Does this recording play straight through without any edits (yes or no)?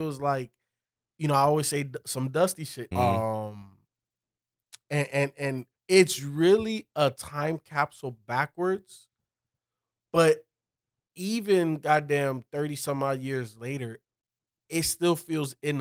no